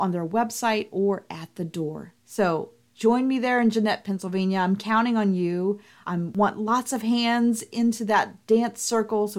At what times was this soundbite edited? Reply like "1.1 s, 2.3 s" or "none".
2.2 s